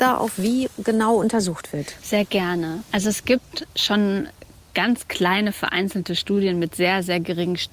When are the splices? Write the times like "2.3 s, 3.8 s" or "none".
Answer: none